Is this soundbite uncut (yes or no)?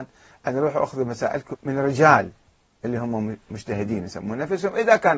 no